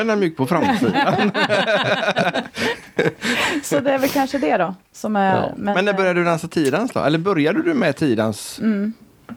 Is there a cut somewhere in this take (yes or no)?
no